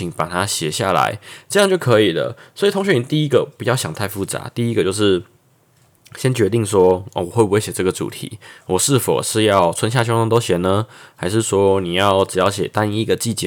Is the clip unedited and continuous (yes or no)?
yes